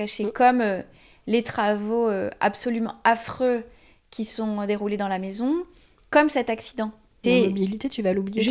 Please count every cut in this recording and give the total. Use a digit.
1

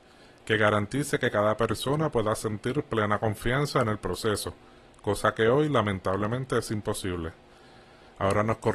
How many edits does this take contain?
0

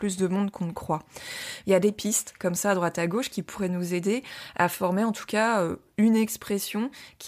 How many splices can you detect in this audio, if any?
1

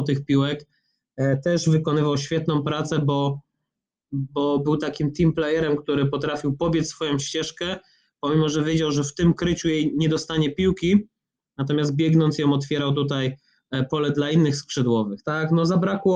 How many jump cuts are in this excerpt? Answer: 1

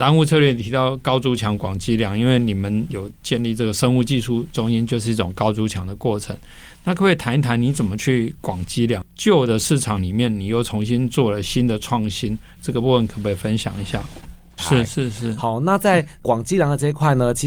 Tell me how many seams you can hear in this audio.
3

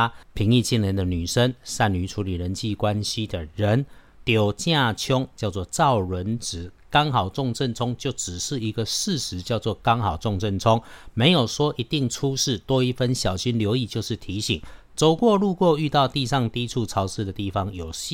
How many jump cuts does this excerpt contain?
1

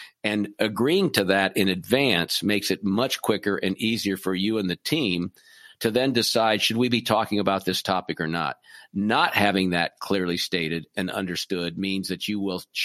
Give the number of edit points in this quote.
0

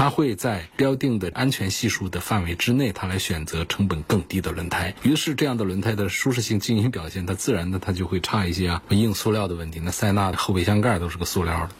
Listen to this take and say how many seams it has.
1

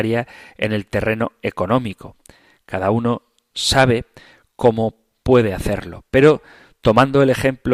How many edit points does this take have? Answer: 0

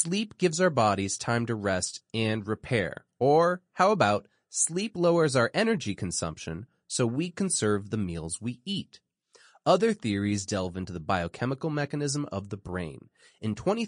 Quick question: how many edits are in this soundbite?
0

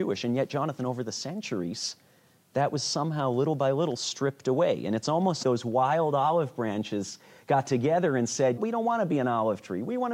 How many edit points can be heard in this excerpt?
2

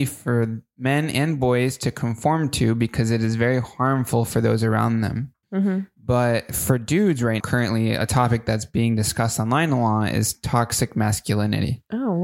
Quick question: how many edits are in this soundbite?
2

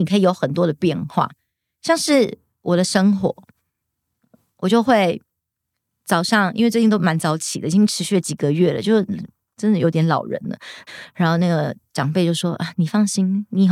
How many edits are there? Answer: 1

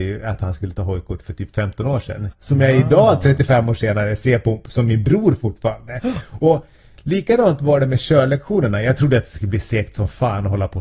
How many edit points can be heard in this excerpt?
1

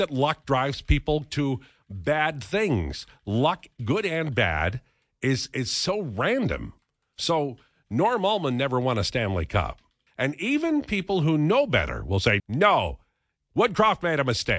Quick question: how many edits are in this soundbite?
2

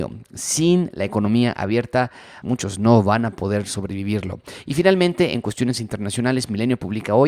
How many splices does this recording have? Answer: 1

